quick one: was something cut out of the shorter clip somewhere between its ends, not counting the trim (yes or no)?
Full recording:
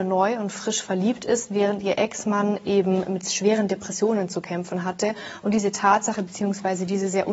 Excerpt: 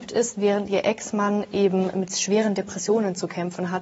no